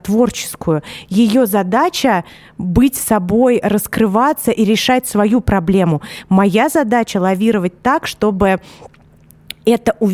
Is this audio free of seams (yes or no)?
yes